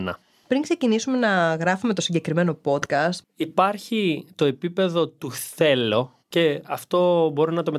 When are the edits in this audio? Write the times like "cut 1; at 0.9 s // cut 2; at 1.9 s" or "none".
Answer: cut 1; at 3.2 s // cut 2; at 6.2 s